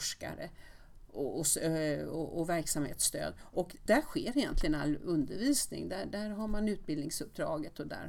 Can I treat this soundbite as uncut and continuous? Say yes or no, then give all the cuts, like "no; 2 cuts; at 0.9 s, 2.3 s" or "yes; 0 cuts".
no; 1 cut; at 3.9 s